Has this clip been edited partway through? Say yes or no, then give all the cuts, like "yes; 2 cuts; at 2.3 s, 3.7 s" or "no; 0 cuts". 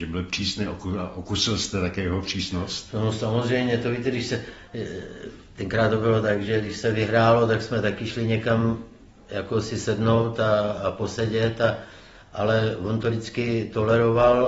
no; 0 cuts